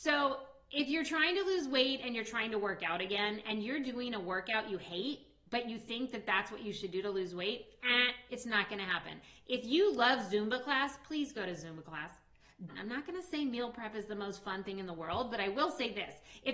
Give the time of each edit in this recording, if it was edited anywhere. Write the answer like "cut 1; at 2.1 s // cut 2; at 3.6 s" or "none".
cut 1; at 8.3 s // cut 2; at 12.7 s